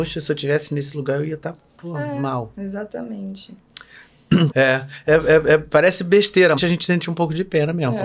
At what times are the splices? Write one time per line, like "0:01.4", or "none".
0:01.7
0:04.5
0:06.6